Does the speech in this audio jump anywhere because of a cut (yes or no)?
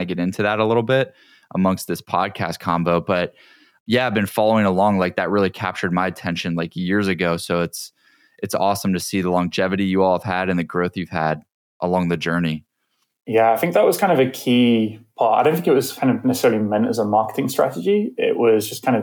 no